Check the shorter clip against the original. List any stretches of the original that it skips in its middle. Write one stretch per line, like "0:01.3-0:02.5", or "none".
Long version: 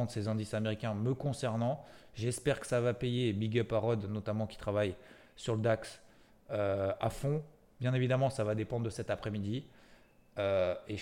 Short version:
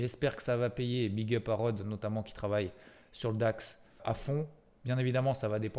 0:06.2-0:07.0